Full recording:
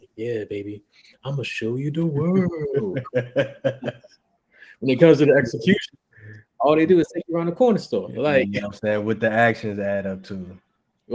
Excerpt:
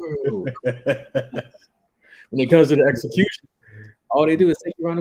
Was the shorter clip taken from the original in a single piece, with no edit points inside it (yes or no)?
yes